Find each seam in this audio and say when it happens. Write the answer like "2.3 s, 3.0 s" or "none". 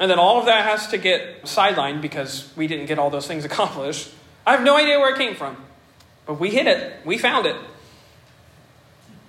1.4 s, 4.4 s